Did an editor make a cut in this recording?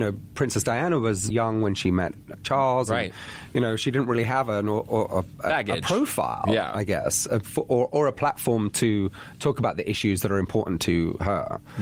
yes; 1 cut; at 1.3 s

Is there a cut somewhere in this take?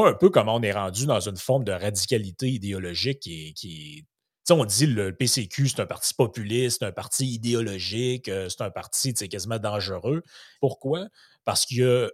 yes; 1 cut; at 10.6 s

